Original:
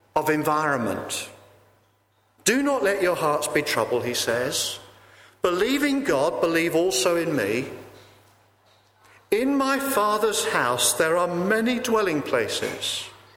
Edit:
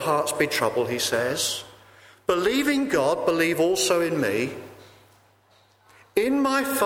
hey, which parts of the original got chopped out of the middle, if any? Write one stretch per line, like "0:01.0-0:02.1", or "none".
none

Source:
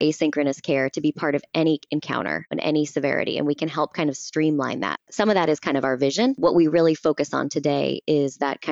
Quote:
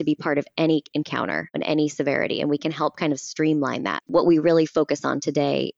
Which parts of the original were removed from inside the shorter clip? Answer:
0:05.0-0:06.4

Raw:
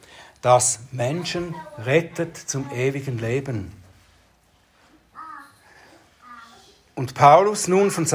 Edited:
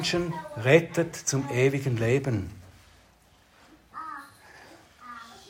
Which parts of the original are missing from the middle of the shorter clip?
none

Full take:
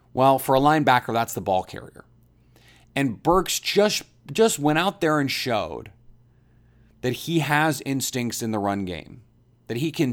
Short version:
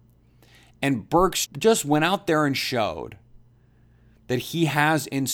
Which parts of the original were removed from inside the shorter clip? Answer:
0:03.6-0:04.2

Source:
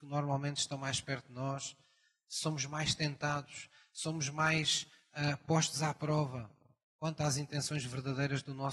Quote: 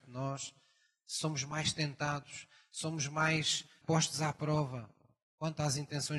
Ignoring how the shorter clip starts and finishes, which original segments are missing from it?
0:05.0-0:05.4

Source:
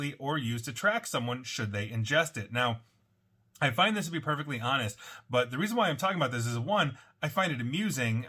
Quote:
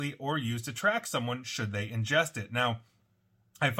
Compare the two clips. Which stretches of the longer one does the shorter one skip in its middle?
none

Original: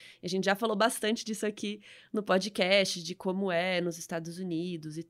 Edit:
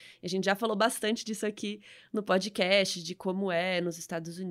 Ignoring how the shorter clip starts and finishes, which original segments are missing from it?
none

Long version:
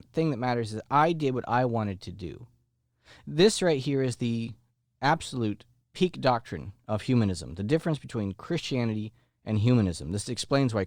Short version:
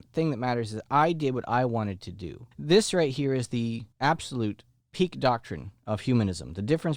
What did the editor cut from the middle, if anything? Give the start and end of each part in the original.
0:02.5-0:03.2
0:04.6-0:04.9

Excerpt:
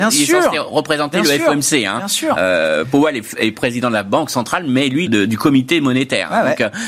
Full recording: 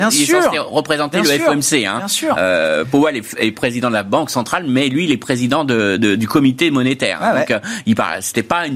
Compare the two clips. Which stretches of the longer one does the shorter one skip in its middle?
0:05.1-0:06.0

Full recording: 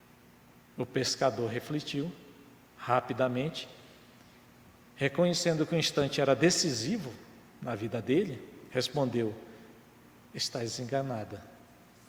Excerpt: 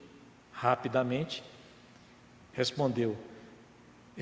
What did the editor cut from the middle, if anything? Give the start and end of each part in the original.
0:04.8-0:08.7

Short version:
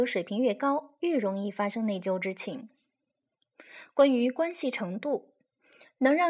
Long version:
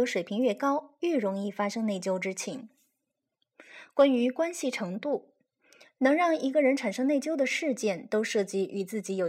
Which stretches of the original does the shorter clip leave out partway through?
none

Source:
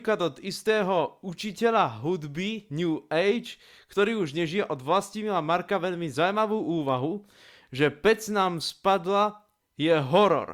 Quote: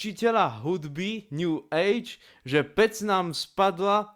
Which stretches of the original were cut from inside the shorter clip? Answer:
0:03.7-0:07.5

